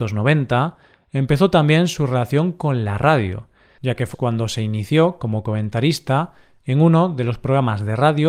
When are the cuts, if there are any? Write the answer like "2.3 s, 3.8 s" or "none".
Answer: 4.1 s